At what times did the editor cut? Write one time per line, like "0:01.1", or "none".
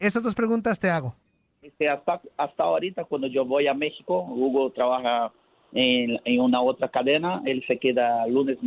0:01.6